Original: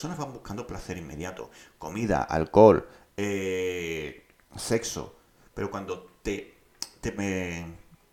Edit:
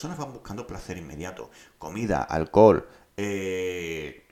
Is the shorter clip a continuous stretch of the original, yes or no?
yes